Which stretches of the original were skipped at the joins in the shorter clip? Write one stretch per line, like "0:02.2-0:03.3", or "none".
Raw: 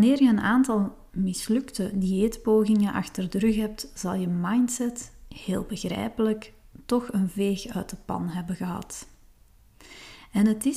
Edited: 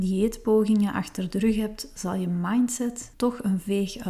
0:05.1-0:06.8